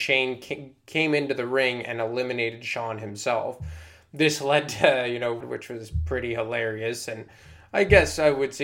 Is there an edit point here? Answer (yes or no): yes